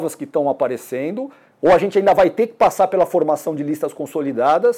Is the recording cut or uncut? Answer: uncut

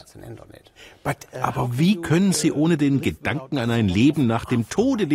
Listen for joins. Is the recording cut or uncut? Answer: uncut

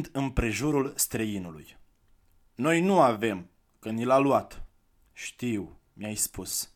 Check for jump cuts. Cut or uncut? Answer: uncut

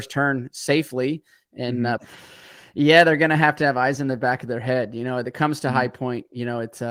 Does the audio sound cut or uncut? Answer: cut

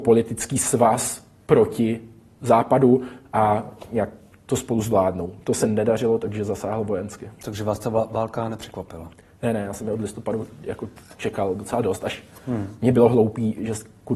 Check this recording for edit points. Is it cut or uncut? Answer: uncut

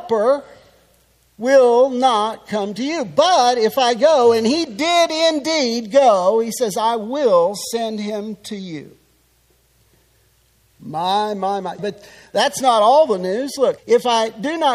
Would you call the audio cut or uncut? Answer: cut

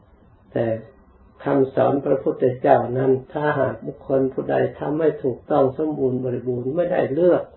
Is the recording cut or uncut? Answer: uncut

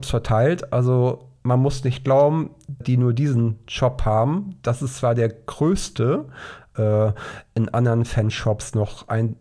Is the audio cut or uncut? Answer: cut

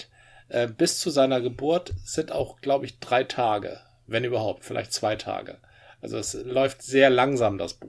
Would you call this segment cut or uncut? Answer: uncut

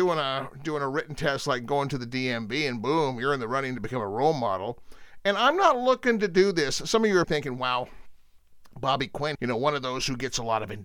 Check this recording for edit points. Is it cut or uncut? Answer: cut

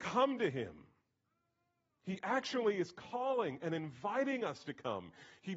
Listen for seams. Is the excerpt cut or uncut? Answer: uncut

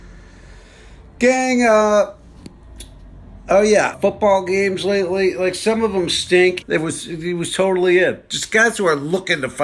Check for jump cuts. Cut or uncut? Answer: cut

